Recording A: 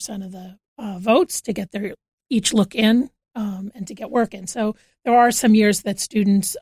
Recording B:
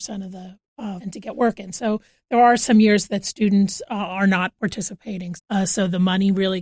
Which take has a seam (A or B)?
B